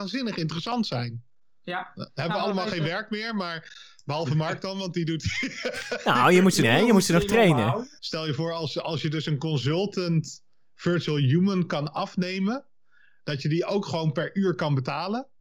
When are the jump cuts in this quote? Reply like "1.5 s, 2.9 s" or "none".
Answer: 6.6 s, 8.0 s